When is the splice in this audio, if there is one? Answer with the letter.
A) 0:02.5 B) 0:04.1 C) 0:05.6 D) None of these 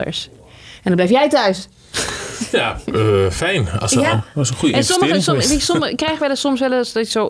B